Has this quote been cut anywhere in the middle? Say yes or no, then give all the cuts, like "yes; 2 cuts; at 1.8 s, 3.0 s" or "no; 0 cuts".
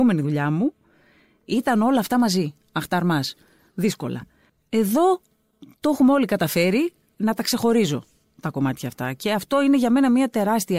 no; 0 cuts